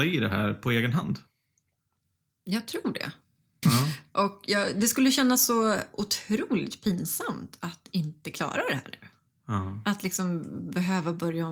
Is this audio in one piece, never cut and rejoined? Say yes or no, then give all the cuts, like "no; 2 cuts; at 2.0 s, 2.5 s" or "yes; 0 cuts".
no; 1 cut; at 3.6 s